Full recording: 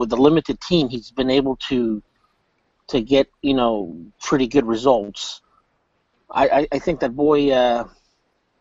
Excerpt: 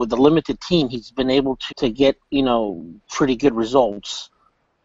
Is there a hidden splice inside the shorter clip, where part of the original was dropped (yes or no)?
yes